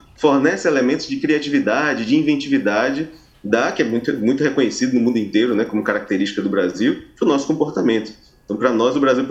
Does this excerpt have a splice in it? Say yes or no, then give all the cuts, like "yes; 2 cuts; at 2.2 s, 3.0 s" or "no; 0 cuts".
no; 0 cuts